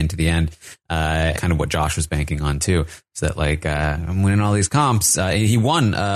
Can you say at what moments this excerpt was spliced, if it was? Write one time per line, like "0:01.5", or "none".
0:01.4